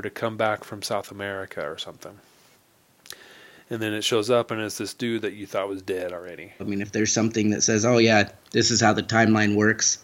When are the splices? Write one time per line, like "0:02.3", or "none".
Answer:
0:06.6